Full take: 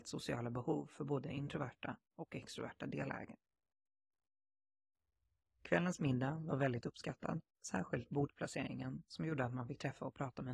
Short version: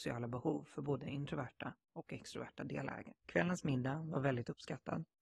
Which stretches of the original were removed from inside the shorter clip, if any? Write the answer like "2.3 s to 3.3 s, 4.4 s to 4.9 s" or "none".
3.4 s to 5.6 s